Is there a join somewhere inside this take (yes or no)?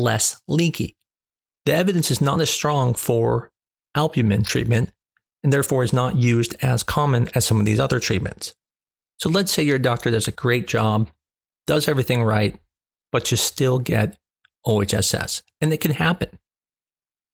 no